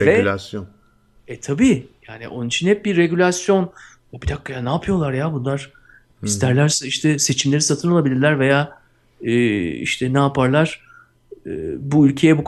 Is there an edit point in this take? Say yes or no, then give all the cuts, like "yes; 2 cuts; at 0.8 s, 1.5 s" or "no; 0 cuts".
no; 0 cuts